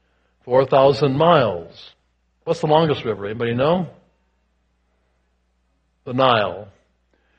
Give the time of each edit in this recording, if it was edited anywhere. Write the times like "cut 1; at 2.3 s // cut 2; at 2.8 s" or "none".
none